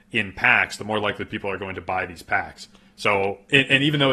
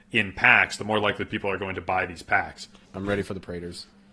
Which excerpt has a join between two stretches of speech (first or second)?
second